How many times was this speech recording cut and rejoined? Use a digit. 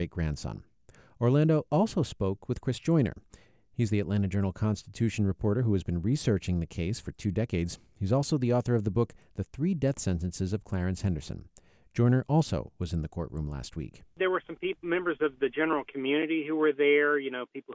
0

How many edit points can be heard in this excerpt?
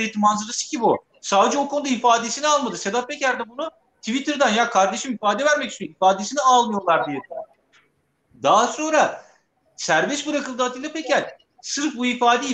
1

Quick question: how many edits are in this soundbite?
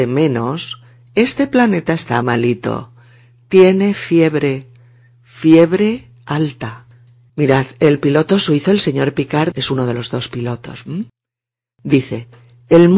3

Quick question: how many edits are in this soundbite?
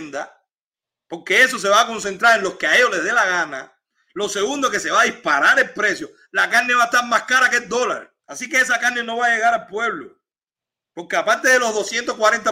2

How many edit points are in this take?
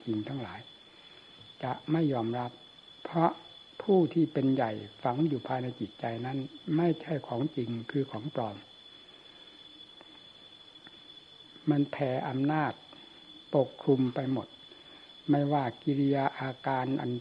0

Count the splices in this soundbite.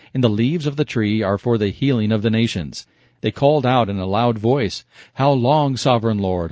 1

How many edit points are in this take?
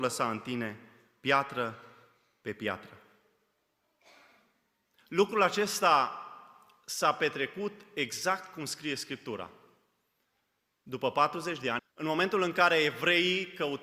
1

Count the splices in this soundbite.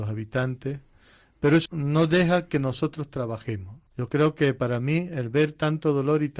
2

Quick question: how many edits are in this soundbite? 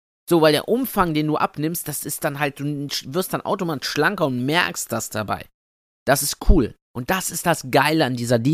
1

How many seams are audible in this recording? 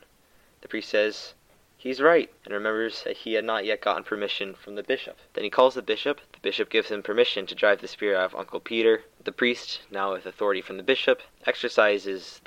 0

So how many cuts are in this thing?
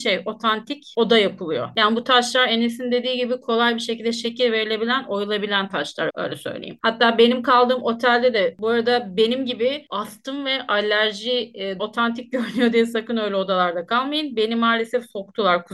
2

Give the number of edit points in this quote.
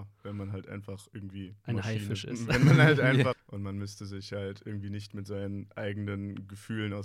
1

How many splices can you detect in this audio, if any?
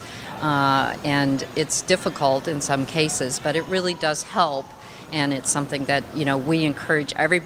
0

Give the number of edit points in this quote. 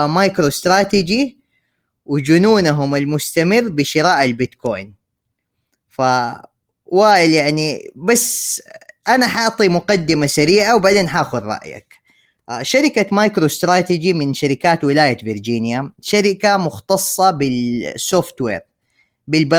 0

